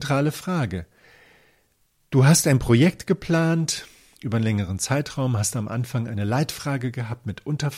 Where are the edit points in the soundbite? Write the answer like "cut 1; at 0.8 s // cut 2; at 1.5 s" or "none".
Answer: none